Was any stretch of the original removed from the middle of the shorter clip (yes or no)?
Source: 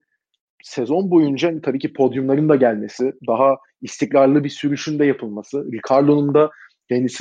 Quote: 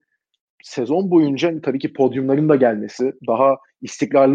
no